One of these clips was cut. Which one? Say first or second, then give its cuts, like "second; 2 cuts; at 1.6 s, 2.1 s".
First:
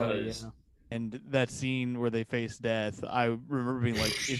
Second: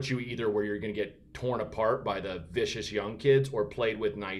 first; 1 cut; at 0.9 s